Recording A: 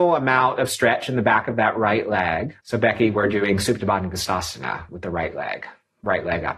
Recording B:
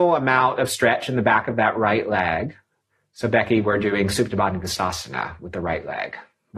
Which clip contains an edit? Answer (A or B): A